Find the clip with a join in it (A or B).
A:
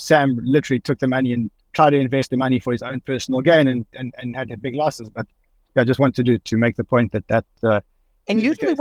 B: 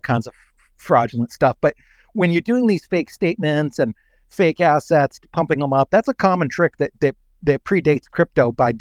A